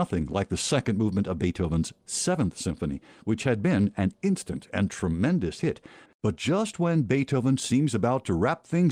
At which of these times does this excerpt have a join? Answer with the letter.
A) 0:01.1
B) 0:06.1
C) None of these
B